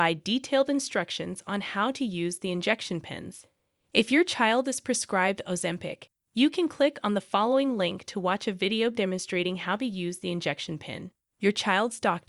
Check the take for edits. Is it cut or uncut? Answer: cut